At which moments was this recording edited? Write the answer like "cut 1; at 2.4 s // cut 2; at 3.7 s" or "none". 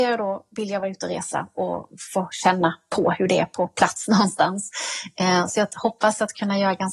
none